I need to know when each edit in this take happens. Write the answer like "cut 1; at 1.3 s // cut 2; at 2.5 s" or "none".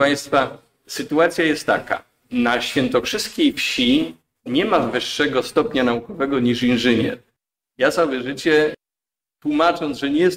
cut 1; at 9.2 s